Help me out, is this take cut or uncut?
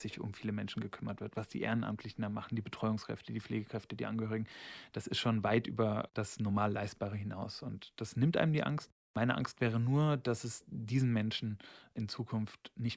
uncut